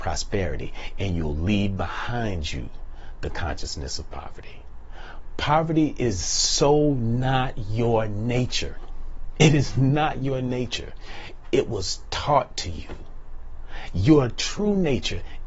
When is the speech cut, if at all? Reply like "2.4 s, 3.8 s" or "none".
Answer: none